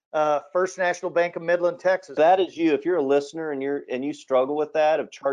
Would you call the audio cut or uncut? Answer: cut